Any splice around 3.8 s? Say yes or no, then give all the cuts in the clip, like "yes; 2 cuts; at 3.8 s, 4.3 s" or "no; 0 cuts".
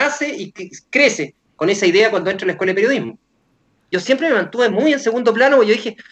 yes; 1 cut; at 3.8 s